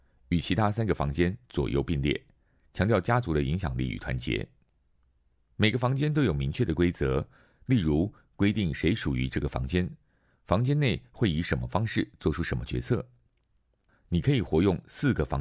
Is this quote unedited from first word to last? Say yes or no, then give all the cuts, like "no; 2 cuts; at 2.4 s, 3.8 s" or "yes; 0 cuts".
no; 1 cut; at 13.9 s